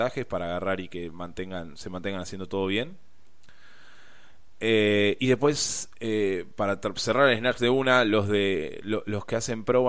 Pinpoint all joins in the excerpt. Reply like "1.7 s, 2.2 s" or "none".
none